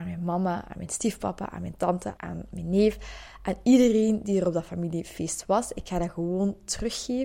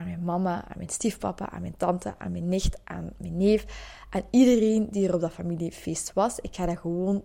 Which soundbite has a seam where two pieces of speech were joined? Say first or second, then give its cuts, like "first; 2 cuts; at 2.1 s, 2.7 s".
first; 1 cut; at 2.2 s